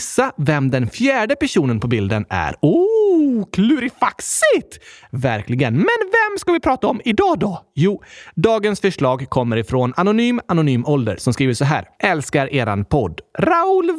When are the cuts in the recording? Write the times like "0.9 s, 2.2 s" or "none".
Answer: 12.0 s